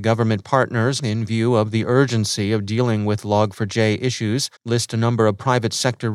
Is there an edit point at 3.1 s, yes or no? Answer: no